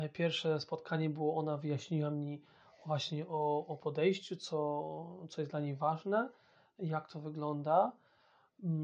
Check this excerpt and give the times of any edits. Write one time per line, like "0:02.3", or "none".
none